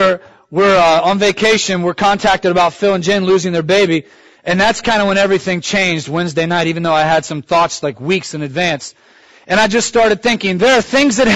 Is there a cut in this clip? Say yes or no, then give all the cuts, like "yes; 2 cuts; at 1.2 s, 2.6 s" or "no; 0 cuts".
no; 0 cuts